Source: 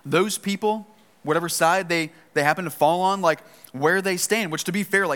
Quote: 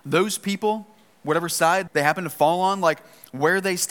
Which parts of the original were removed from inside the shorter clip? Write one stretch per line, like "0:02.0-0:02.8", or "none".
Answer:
0:01.9-0:02.3